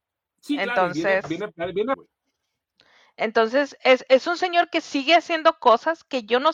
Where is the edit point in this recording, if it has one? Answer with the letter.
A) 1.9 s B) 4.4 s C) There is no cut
A